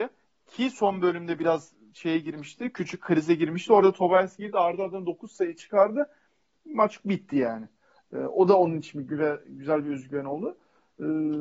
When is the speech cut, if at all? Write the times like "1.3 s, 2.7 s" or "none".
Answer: none